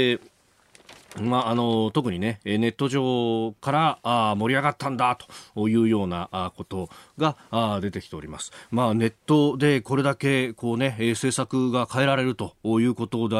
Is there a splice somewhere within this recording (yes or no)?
no